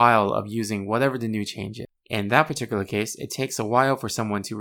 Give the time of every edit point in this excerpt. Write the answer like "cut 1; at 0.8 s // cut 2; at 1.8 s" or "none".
cut 1; at 2.0 s